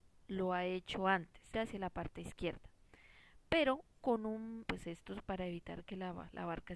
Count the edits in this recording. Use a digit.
2